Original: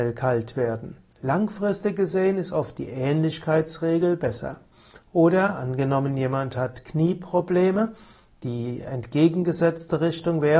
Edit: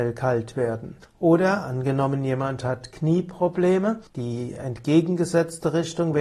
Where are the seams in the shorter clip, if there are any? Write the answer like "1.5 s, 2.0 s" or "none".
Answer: 1.0 s, 4.1 s

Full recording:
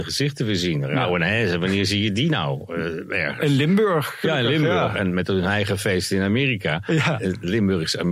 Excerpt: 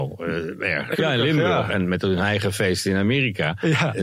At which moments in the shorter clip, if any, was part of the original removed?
0.9 s

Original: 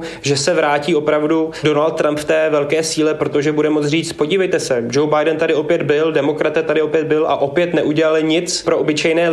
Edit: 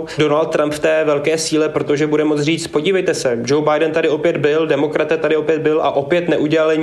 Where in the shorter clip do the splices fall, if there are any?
none

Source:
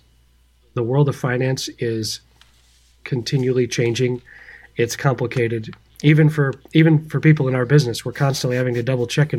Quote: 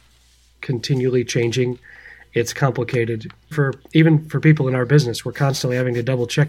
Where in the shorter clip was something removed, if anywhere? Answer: 3.5 s

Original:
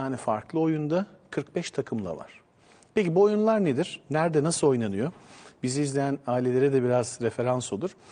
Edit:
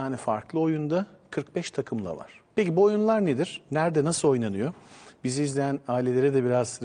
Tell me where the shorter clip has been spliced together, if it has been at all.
2.5 s

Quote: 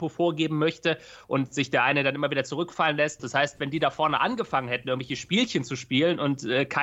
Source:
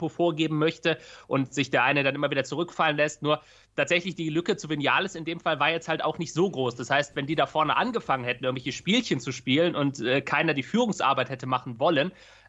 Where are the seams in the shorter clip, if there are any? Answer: 3.2 s

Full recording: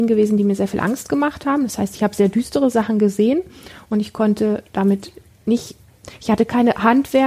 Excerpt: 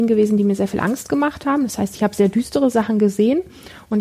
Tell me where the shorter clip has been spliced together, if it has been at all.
none

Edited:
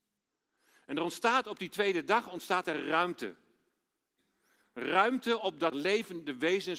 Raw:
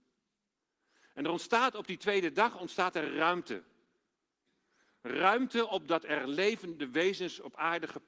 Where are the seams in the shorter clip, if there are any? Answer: 5.7 s

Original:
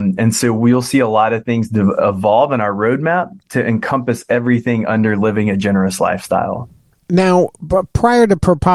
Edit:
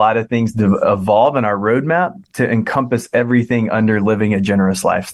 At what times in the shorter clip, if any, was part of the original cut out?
none

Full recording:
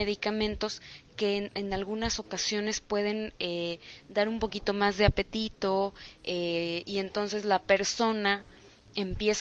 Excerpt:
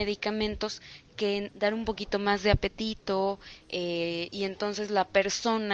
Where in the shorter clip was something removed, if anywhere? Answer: 1.5 s

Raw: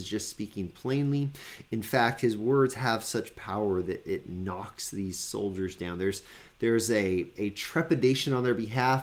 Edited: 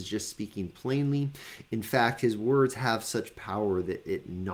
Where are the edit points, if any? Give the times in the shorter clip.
none

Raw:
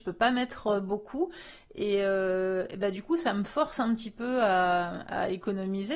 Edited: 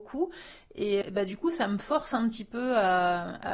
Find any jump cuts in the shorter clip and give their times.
1.0 s

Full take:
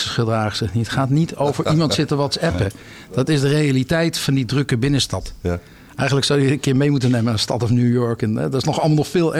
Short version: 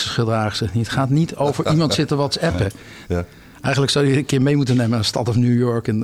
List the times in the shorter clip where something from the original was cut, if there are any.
3.1 s

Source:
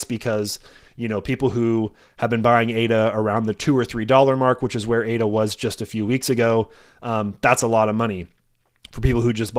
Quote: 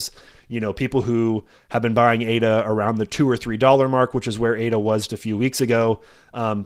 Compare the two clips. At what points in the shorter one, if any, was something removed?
5.1 s

